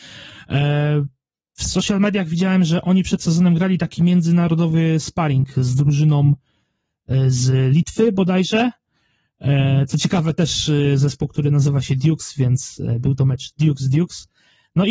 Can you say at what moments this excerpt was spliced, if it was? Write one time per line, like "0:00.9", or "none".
none